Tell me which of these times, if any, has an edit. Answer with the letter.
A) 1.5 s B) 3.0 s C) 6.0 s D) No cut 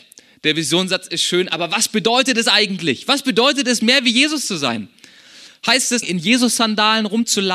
C